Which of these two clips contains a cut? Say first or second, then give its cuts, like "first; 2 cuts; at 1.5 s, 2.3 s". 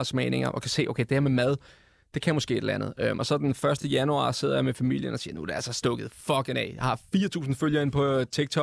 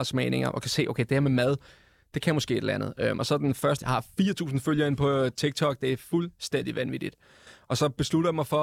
second; 1 cut; at 3.8 s